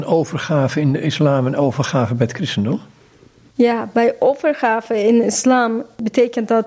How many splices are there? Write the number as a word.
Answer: zero